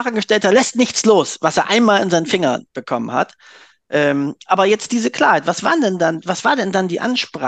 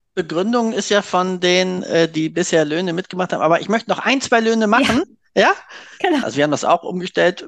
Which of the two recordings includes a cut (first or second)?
second